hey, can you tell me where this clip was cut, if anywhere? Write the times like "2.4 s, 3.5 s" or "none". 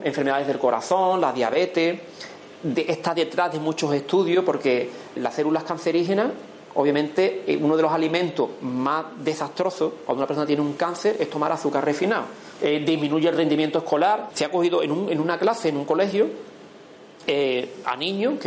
5.2 s, 12.6 s, 14.3 s